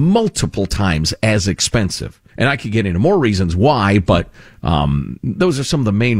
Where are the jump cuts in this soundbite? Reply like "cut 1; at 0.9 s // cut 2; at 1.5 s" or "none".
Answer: cut 1; at 2.3 s

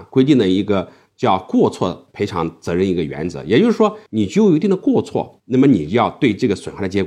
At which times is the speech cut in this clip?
cut 1; at 4.1 s // cut 2; at 5.4 s

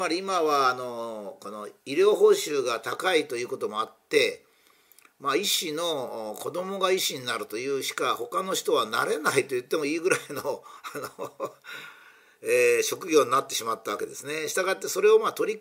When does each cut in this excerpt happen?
none

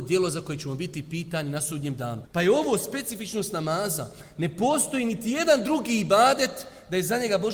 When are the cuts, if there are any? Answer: cut 1; at 2.2 s

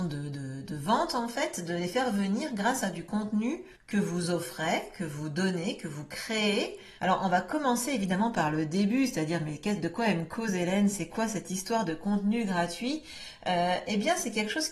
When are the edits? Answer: cut 1; at 3.7 s // cut 2; at 7.0 s

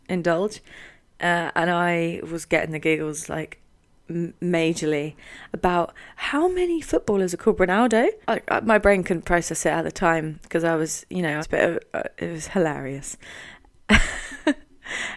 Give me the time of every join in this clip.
cut 1; at 8.2 s // cut 2; at 11.4 s

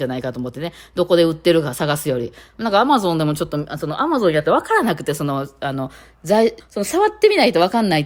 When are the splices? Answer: cut 1; at 6.6 s

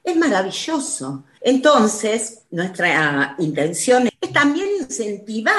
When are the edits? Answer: cut 1; at 1.4 s // cut 2; at 4.1 s

